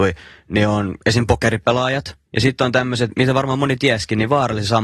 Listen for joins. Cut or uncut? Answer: cut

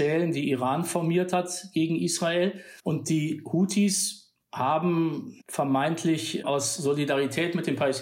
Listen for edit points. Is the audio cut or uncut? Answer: cut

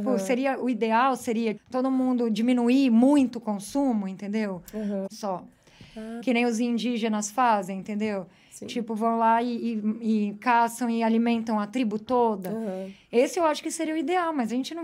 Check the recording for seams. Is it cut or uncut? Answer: cut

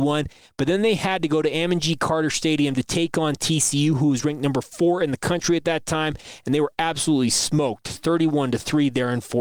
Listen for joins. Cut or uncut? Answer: uncut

